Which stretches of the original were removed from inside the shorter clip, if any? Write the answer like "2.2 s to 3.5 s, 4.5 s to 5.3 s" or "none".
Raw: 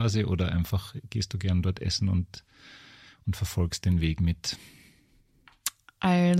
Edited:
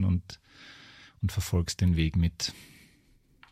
none